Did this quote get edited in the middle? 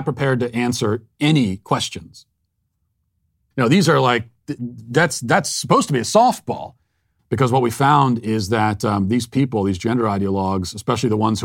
yes; 2 cuts; at 3.5 s, 7.2 s

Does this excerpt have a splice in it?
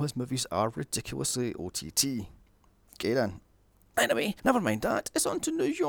no; 0 cuts

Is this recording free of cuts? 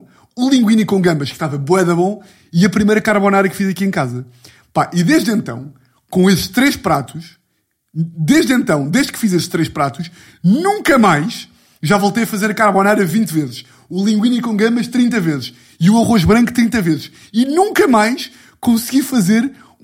yes; 0 cuts

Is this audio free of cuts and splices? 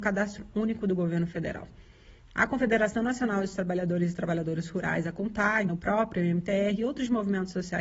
no; 1 cut; at 5.7 s

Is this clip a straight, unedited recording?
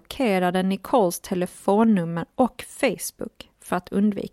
yes; 0 cuts

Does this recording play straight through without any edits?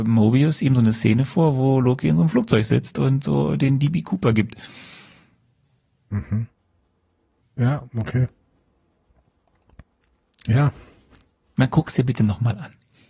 no; 1 cut; at 7.4 s

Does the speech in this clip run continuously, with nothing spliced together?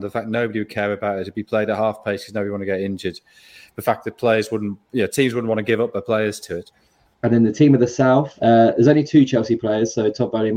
no; 1 cut; at 7.1 s

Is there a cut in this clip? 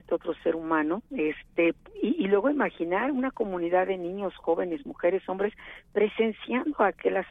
yes; 1 cut; at 1.1 s

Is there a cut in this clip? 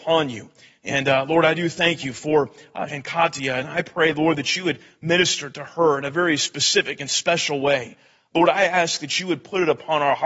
yes; 1 cut; at 2.9 s

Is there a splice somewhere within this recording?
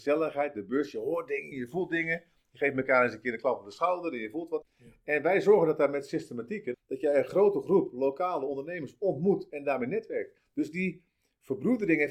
yes; 3 cuts; at 1.5 s, 4.6 s, 6.7 s

